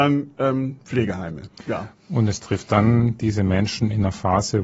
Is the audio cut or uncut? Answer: uncut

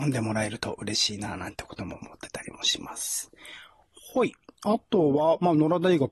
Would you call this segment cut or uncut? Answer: uncut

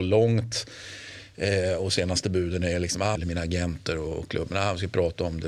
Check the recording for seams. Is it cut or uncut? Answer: cut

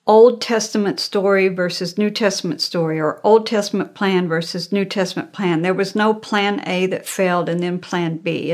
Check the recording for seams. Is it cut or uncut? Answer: uncut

